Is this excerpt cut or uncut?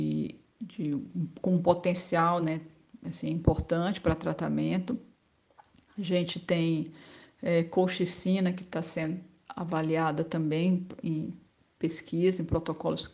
uncut